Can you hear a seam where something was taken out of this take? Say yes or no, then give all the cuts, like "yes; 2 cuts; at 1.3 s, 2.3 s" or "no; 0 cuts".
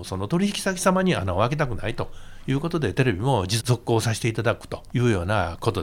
yes; 2 cuts; at 3.6 s, 4.9 s